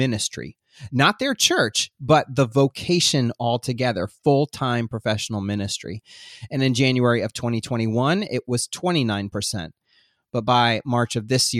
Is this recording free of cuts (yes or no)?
yes